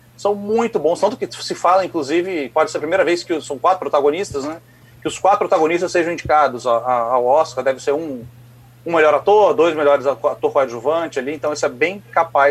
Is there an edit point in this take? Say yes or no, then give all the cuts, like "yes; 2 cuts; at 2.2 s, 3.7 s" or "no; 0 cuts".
no; 0 cuts